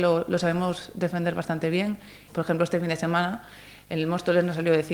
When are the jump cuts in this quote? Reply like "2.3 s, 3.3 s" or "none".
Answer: 2.3 s